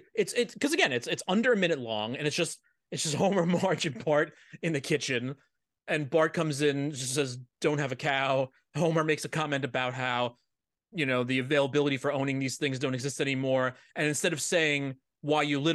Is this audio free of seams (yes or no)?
yes